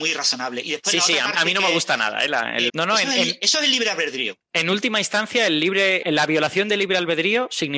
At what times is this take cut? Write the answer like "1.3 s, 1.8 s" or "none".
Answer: 2.7 s, 6.0 s